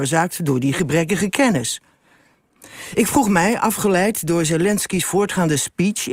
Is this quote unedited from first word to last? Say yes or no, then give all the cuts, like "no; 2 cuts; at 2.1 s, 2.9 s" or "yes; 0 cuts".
yes; 0 cuts